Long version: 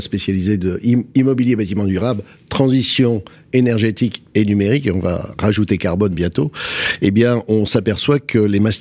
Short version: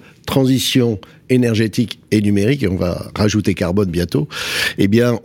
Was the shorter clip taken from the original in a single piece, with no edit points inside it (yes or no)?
yes